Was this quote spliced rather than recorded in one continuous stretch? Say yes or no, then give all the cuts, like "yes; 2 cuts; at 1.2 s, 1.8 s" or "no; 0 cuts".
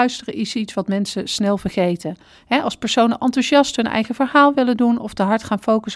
no; 0 cuts